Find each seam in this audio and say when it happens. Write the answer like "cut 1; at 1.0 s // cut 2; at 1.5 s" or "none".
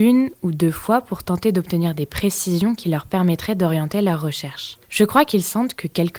cut 1; at 4.8 s